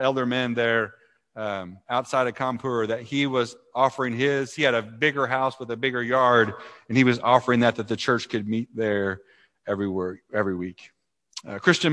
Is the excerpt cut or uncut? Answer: uncut